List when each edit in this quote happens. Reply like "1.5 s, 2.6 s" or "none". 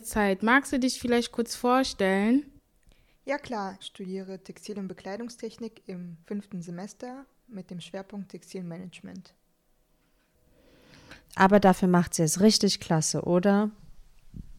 3.8 s, 6.2 s, 11.2 s